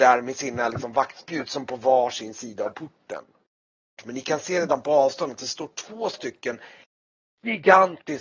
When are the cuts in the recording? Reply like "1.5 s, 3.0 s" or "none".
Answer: 4.0 s